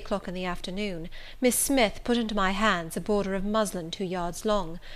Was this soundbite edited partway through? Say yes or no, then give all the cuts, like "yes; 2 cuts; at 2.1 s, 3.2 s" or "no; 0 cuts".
no; 0 cuts